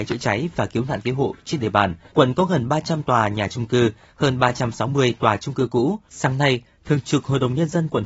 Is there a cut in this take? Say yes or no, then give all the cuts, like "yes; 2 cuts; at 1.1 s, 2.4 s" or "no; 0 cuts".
yes; 2 cuts; at 2.1 s, 6.1 s